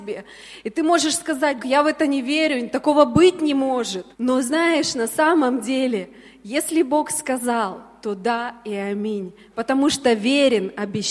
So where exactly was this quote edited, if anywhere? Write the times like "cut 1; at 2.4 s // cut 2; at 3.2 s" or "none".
cut 1; at 1.6 s // cut 2; at 4.1 s